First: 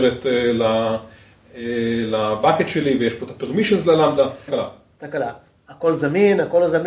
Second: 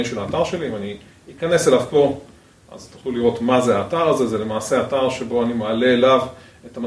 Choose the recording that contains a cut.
first; 1 cut; at 4.5 s

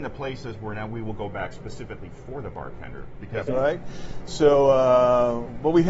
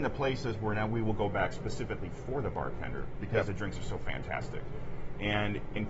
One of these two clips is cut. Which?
first; 1 cut; at 3.5 s

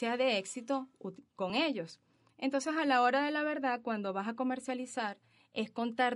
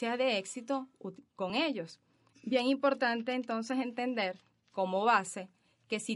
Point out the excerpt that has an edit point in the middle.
second; 1 cut; at 2.3 s

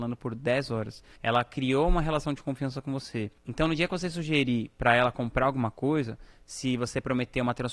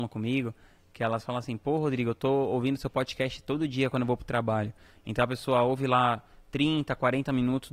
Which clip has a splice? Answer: first; 1 cut; at 1.2 s

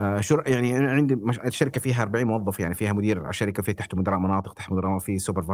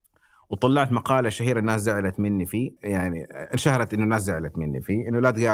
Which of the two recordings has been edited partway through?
second; 1 cut; at 2.8 s

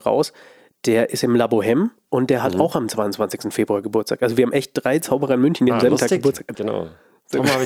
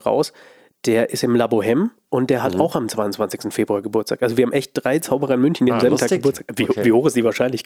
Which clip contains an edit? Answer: first; 1 cut; at 6.5 s

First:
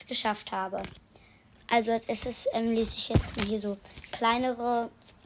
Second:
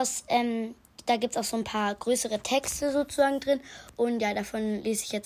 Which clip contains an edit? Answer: first; 1 cut; at 1.5 s

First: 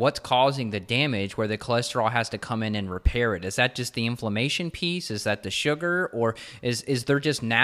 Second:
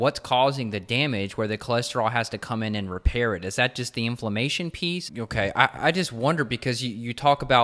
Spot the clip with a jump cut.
second; 1 cut; at 5.1 s

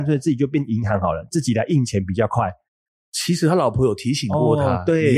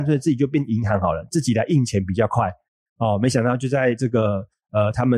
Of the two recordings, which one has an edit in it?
first; 1 cut; at 2.9 s

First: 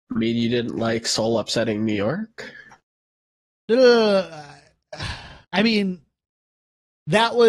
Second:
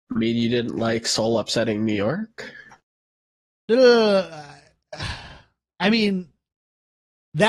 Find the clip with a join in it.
first; 1 cut; at 5.4 s

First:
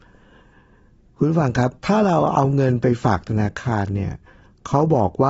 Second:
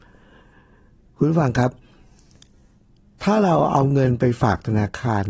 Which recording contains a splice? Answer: first; 1 cut; at 1.8 s

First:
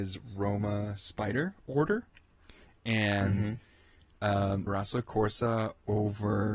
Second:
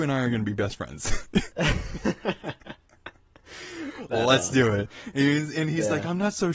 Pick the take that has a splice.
first; 1 cut; at 4.7 s

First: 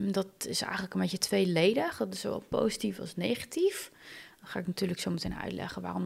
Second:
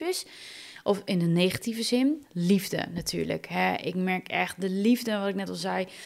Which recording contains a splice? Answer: second; 1 cut; at 2.2 s

